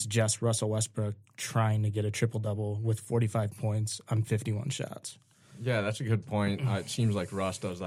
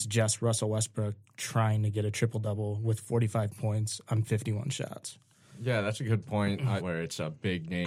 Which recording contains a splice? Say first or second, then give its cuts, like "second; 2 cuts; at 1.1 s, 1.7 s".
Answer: second; 1 cut; at 6.8 s